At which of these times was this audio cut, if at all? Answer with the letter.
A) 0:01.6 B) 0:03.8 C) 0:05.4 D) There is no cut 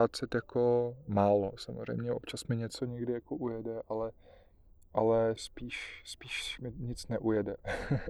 C